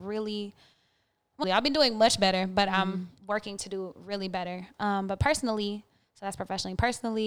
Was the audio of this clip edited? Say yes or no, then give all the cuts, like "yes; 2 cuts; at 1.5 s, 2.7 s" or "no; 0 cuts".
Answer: yes; 1 cut; at 1.4 s